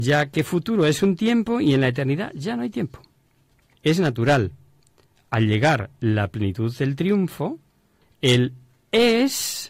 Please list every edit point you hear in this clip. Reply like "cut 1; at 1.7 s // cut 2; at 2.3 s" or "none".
cut 1; at 3.7 s // cut 2; at 8.0 s